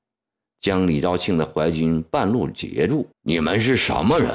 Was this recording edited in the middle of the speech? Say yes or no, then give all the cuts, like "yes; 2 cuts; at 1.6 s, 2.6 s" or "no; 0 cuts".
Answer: yes; 1 cut; at 3.1 s